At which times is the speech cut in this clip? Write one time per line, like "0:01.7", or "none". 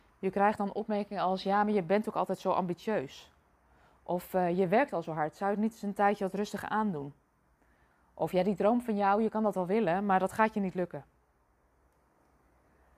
none